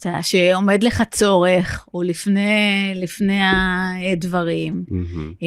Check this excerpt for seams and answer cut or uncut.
uncut